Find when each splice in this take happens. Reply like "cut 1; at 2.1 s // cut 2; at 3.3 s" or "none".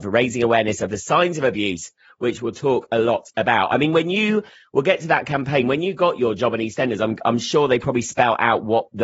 none